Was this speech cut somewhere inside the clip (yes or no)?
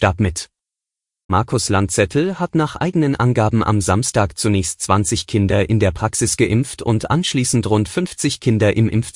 yes